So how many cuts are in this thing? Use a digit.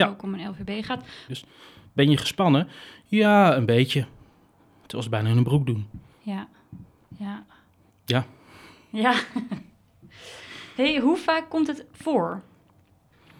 2